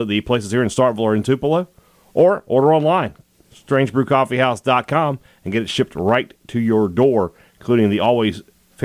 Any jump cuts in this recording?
no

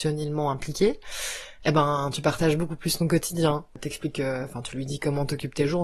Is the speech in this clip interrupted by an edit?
no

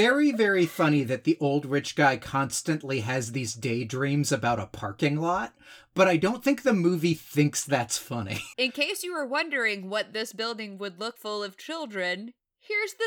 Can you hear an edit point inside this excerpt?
yes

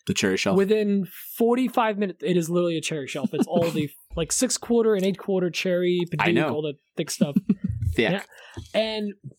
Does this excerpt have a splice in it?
yes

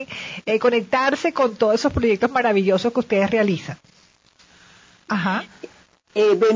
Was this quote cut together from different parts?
yes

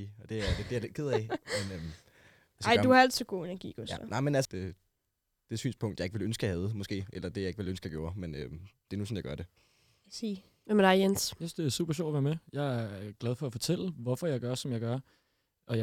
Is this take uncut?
no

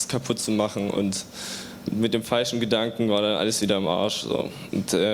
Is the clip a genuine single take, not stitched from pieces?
yes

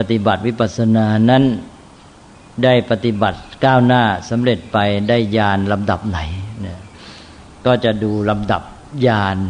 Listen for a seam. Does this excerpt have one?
no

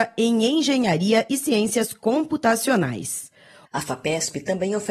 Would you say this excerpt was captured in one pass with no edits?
no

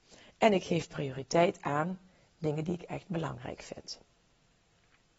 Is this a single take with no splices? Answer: yes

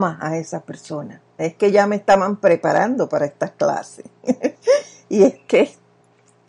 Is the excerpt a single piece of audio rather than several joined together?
no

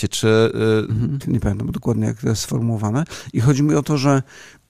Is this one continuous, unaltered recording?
no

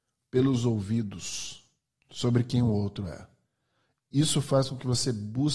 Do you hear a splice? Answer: no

